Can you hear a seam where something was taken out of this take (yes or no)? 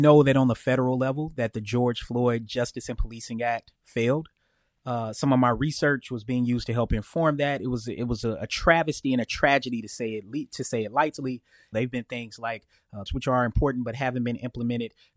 yes